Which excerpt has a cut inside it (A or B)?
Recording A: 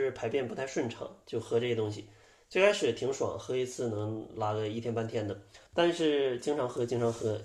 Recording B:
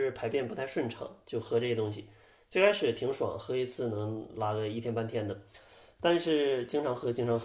A